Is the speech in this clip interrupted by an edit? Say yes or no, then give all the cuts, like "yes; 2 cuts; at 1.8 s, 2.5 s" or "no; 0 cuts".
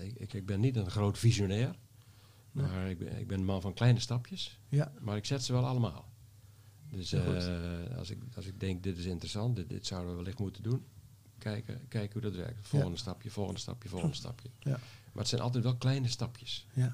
no; 0 cuts